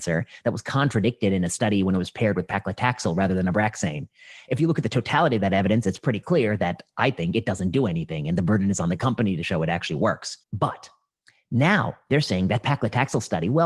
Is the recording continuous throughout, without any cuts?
no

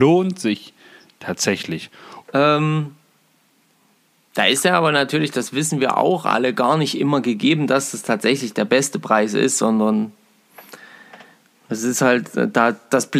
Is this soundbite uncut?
no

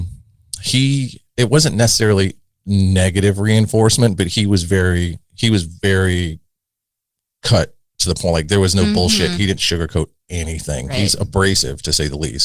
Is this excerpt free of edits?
yes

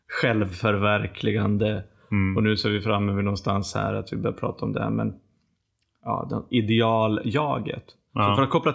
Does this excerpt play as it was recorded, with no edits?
yes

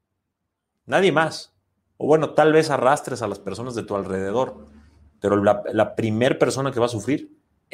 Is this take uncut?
yes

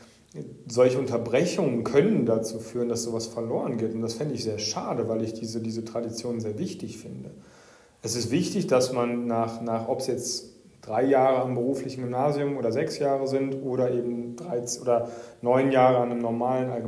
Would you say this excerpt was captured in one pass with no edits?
yes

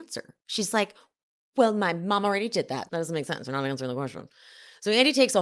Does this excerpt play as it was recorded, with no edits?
no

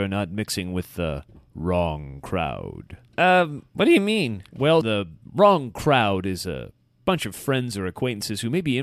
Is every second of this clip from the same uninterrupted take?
no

